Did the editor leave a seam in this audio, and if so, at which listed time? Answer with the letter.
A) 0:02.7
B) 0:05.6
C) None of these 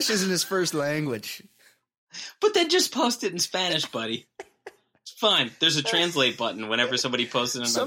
C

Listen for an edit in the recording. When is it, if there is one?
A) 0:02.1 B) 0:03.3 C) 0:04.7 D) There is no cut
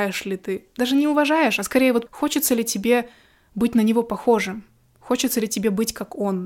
A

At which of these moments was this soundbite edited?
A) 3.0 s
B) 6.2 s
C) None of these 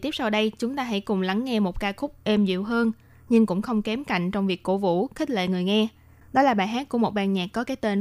C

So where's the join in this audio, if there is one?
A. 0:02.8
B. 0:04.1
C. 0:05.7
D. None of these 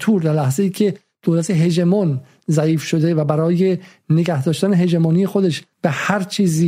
C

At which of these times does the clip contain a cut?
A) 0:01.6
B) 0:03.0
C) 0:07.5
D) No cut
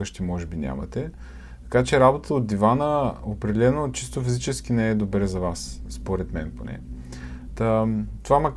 C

